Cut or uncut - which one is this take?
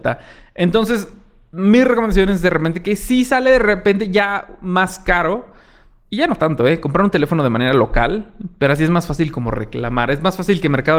uncut